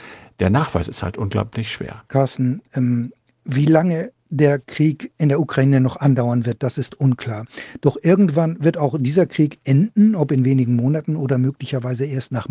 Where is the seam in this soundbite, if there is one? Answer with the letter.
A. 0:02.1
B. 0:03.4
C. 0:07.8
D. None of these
A